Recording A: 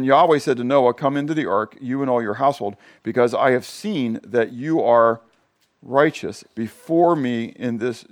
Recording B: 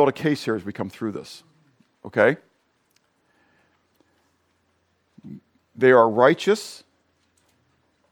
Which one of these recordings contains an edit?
A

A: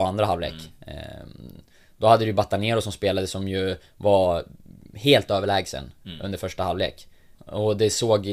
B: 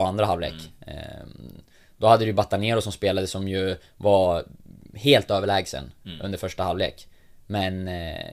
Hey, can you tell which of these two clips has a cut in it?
A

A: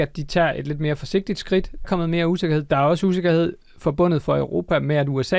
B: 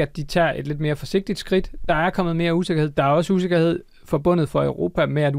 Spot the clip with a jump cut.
A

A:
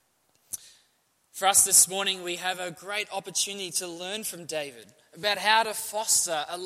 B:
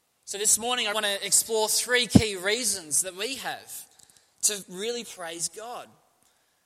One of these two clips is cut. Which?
B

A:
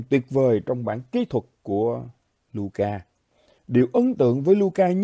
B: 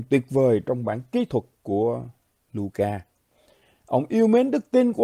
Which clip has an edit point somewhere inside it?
A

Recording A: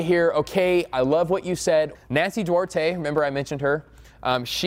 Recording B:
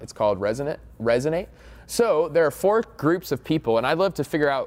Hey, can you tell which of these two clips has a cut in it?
A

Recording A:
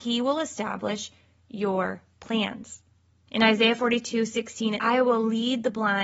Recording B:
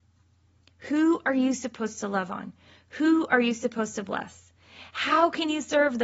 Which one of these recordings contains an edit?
A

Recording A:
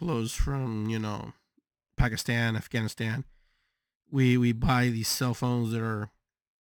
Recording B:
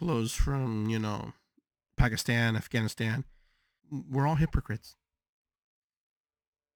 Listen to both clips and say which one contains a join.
B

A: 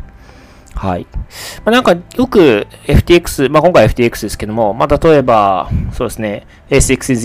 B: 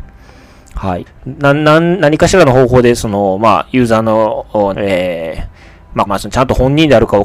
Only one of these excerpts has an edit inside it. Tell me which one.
B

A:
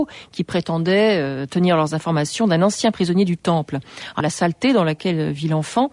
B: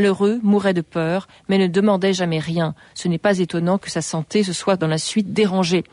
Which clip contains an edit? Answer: A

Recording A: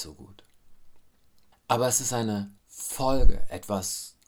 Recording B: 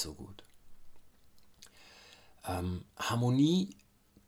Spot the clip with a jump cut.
A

